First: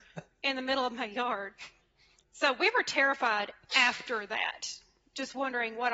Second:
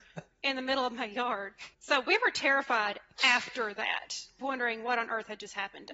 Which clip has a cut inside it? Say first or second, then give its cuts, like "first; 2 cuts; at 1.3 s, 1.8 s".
second; 2 cuts; at 1.7 s, 4.4 s